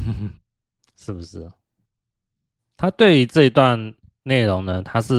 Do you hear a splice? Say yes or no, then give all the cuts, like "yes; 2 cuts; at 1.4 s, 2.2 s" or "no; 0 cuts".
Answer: yes; 1 cut; at 2.6 s